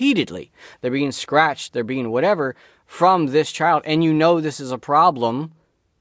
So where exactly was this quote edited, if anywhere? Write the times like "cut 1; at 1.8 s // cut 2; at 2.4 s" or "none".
cut 1; at 1.7 s